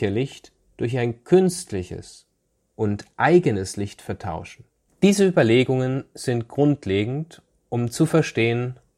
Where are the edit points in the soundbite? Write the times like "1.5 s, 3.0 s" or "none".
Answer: 4.9 s